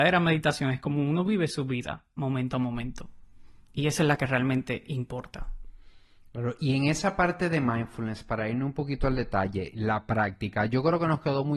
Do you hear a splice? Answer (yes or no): no